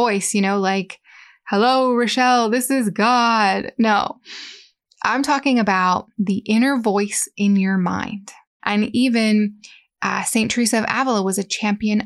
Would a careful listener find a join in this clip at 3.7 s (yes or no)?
no